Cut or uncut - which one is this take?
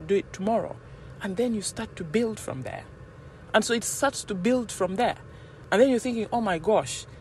cut